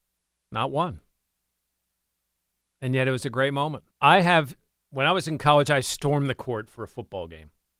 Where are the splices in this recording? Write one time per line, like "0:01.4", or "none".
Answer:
0:03.9